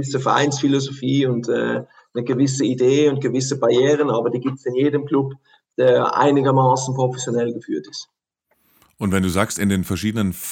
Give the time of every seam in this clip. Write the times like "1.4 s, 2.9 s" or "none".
none